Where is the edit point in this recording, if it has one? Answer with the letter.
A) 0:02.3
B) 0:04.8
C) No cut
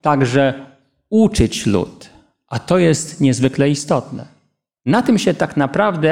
B